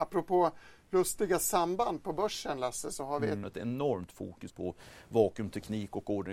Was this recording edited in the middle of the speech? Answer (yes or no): yes